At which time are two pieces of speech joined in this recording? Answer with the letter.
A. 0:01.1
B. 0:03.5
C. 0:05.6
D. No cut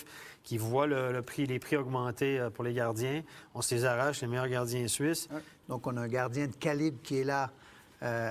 C